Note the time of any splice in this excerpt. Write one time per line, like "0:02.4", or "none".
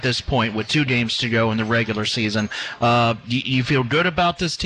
none